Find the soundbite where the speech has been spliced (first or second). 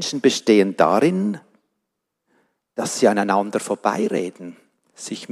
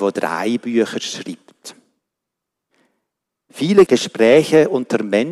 second